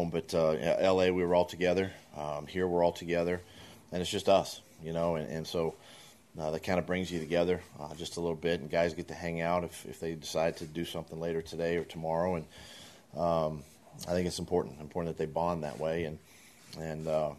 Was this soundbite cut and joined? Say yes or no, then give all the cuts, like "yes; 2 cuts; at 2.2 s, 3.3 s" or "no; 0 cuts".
no; 0 cuts